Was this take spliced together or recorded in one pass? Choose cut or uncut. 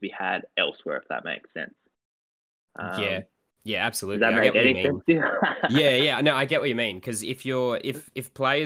uncut